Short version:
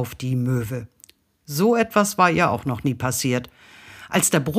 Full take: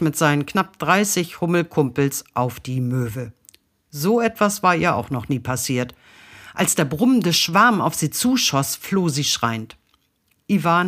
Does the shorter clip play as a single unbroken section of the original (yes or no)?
yes